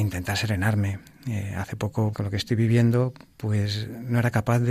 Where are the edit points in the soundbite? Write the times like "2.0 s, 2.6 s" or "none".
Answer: 2.1 s